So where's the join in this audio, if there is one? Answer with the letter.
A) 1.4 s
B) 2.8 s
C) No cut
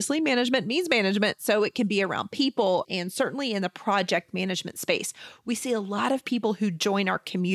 B